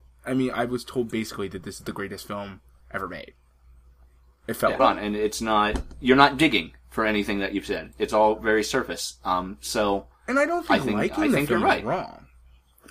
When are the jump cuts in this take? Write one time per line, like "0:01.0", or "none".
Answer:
0:04.8

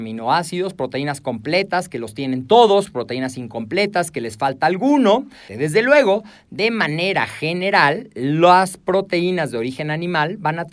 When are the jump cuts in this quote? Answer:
0:05.5

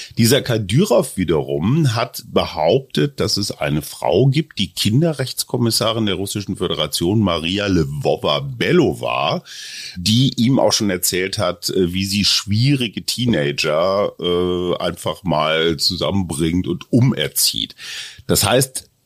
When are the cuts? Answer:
none

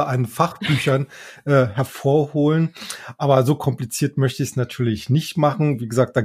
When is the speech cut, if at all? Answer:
none

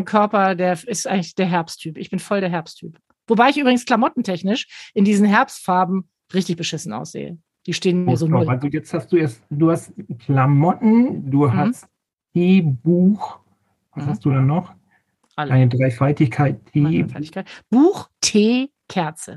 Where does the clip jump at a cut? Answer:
none

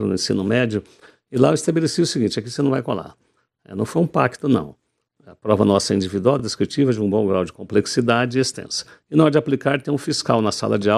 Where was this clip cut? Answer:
none

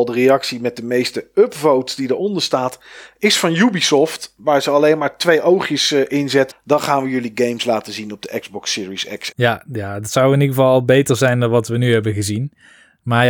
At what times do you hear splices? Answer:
0:06.5
0:09.3

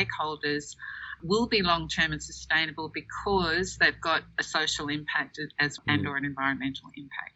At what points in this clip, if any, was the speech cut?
0:05.8

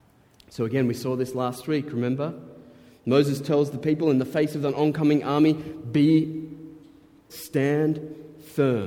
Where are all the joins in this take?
0:07.3

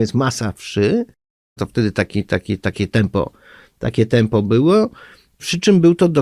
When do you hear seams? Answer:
0:01.6

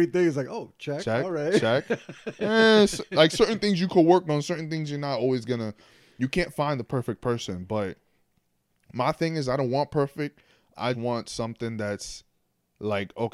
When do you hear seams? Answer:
0:10.9

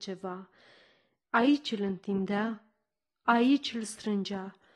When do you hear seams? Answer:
0:01.2

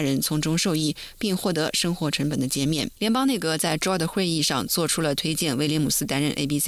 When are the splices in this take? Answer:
0:03.0

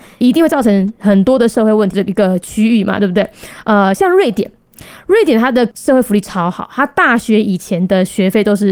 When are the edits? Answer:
0:01.9

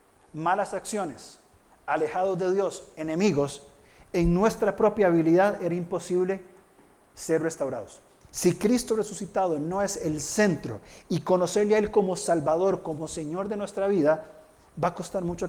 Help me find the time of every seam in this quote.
0:08.2

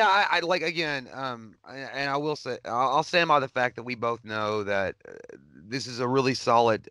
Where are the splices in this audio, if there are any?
none

